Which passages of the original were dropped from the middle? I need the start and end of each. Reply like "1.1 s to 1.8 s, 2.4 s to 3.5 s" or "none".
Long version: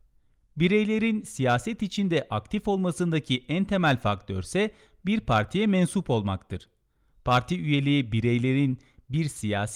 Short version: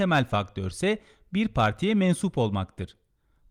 none